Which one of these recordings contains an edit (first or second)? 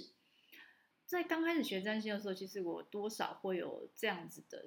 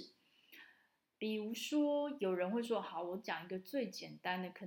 first